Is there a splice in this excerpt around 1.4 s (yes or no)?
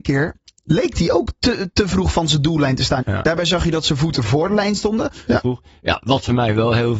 no